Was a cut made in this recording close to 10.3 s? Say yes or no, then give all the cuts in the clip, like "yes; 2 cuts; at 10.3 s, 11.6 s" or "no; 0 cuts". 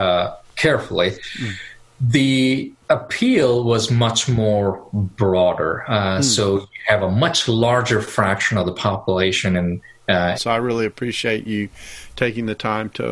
yes; 2 cuts; at 2.8 s, 10.3 s